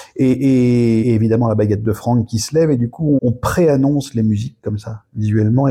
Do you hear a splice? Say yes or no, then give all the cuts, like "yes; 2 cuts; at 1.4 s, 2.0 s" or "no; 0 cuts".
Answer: yes; 2 cuts; at 1.0 s, 3.2 s